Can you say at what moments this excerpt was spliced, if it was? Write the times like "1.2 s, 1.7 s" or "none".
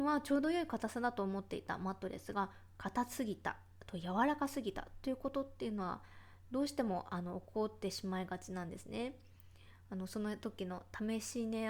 none